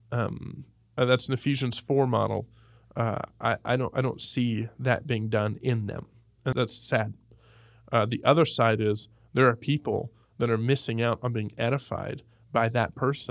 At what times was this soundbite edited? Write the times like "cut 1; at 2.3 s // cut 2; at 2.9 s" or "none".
cut 1; at 1.0 s // cut 2; at 6.5 s